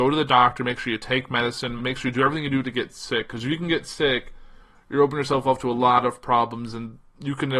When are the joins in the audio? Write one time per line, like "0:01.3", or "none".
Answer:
0:01.8